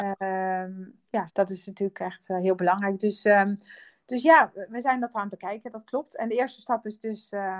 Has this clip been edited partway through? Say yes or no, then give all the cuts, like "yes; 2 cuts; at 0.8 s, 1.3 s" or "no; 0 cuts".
yes; 1 cut; at 1.3 s